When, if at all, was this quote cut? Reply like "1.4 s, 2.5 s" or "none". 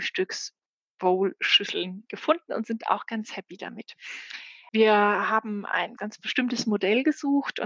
4.7 s, 6.0 s